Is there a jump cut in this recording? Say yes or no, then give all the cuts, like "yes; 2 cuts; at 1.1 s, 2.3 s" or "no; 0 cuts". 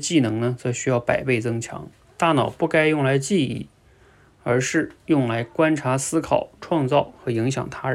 no; 0 cuts